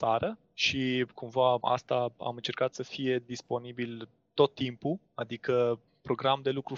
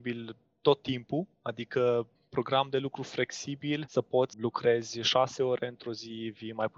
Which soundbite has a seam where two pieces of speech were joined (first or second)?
second